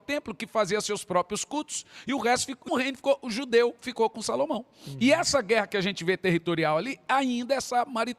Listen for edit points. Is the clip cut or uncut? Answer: cut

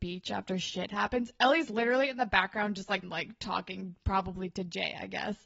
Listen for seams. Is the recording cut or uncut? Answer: cut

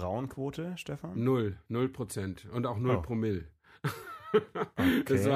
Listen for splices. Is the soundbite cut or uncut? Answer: uncut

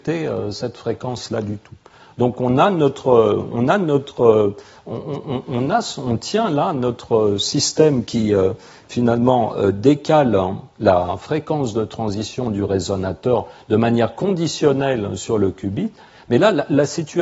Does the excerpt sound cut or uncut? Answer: uncut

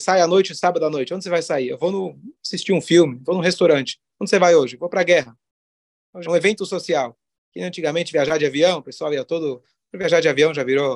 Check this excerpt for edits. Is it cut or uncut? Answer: cut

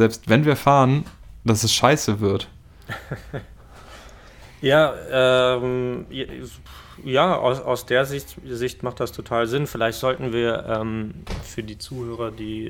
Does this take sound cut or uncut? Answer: uncut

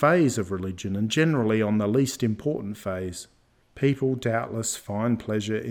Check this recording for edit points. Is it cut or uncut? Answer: cut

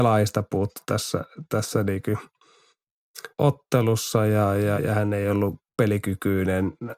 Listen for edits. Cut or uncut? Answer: cut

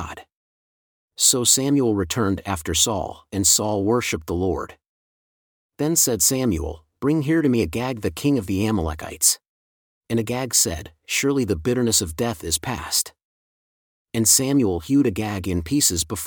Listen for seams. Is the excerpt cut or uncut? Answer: cut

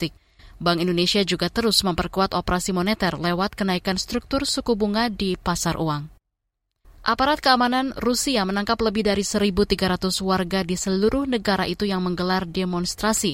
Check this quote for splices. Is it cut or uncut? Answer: cut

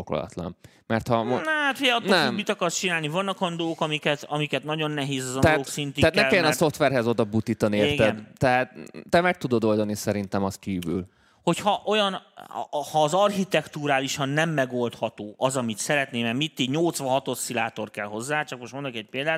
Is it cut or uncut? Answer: uncut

